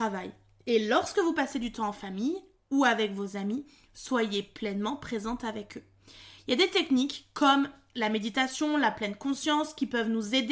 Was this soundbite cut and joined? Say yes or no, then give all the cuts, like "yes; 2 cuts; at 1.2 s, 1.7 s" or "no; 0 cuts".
no; 0 cuts